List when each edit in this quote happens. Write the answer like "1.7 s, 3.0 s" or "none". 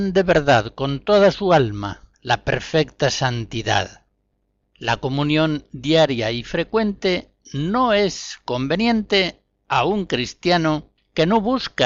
4.7 s